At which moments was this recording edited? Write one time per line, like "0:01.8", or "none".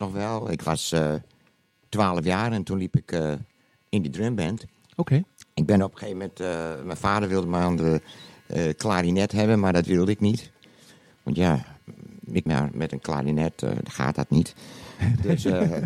0:12.5